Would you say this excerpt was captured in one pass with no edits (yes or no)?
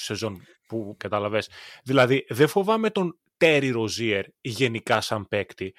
no